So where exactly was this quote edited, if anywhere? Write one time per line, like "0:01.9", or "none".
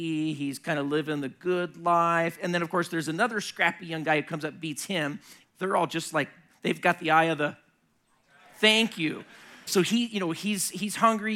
0:05.4
0:09.7